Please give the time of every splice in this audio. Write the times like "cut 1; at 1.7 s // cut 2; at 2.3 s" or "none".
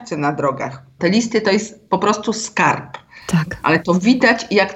cut 1; at 1.0 s